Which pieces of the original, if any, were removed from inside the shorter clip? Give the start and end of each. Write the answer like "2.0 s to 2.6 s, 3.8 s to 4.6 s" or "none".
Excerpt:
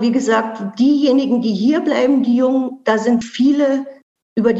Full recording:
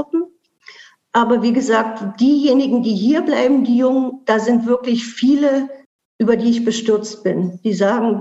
4.6 s to 5.0 s